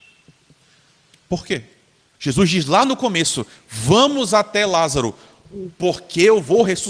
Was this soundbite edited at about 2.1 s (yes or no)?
yes